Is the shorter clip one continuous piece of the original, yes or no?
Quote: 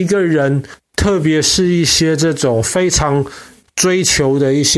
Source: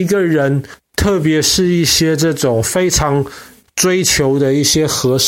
yes